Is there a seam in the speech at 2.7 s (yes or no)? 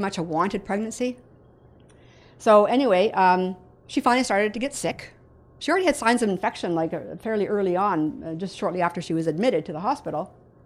no